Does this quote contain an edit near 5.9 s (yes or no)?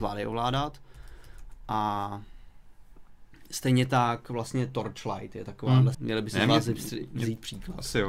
yes